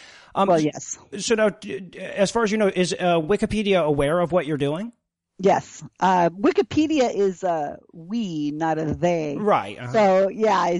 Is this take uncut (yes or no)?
yes